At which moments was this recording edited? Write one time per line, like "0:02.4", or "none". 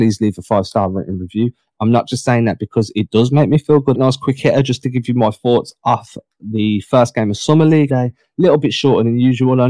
0:03.9
0:07.9